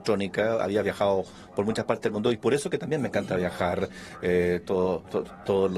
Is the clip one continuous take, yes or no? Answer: yes